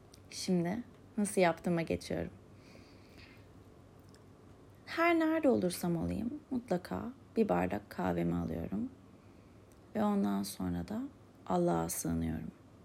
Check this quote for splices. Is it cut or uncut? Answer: uncut